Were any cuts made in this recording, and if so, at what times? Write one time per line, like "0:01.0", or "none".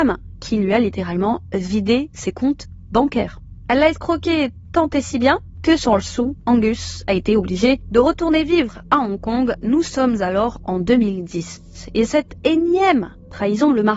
none